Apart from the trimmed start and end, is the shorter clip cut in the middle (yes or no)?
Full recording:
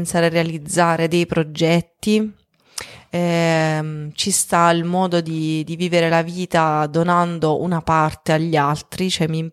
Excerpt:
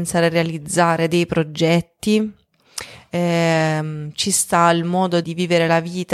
yes